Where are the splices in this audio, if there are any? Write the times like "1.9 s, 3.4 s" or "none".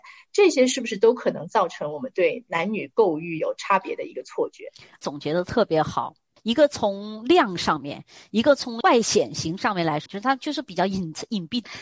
10.1 s